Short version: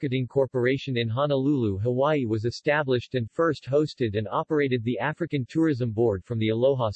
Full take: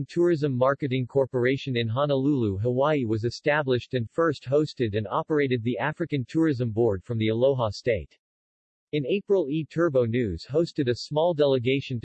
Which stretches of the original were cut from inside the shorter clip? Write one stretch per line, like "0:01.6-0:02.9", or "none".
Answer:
none